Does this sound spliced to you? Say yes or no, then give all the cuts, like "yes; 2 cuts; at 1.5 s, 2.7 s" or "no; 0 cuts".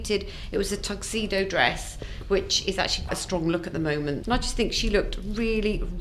yes; 2 cuts; at 3.1 s, 4.2 s